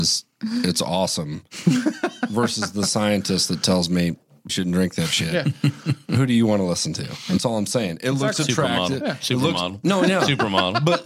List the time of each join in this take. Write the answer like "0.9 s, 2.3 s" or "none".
4.5 s